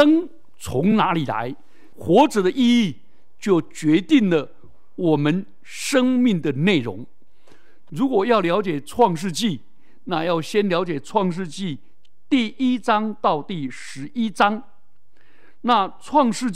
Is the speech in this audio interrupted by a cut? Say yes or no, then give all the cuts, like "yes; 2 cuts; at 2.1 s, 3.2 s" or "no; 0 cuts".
yes; 2 cuts; at 1.9 s, 7.9 s